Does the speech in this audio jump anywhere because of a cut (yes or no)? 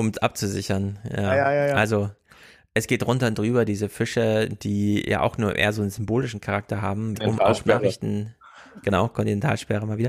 yes